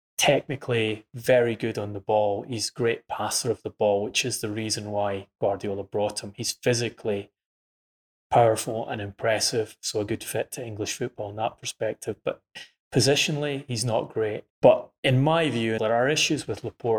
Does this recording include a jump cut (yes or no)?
yes